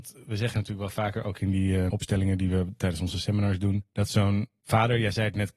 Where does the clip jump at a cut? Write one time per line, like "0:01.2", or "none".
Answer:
0:01.9